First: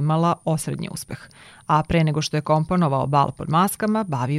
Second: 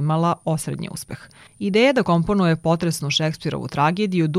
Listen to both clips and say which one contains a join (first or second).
second